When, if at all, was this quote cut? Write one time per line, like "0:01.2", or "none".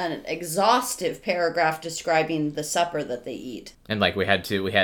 0:03.7